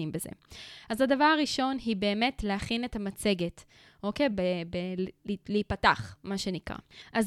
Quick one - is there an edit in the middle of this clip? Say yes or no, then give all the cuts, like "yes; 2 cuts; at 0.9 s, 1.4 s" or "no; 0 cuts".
yes; 1 cut; at 4.3 s